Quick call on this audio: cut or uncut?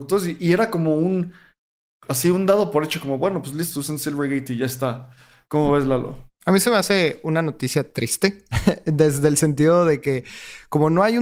uncut